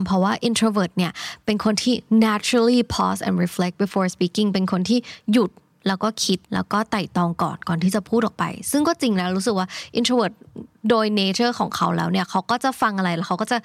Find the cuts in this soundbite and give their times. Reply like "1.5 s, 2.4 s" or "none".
6.4 s